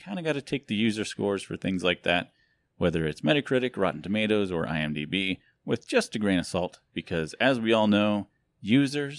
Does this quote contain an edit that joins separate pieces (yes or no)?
no